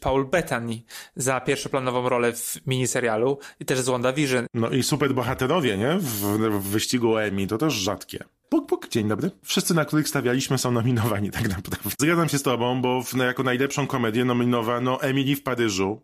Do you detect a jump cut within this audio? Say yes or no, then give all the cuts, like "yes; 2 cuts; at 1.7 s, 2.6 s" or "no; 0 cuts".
yes; 2 cuts; at 8.4 s, 11.9 s